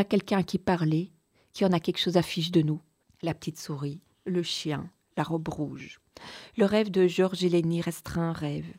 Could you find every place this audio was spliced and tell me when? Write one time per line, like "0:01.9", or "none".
0:03.0